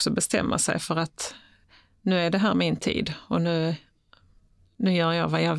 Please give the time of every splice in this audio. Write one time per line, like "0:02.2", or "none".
none